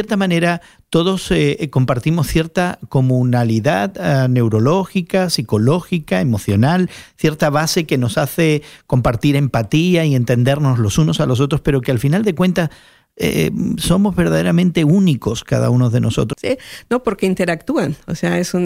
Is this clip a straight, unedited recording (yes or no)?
no